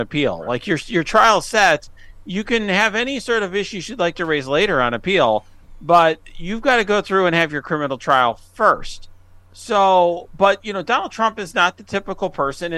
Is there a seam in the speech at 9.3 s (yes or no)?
no